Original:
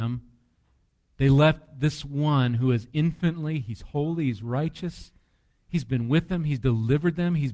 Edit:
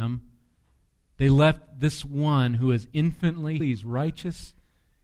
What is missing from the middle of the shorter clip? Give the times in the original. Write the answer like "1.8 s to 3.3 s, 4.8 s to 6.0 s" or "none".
3.6 s to 4.2 s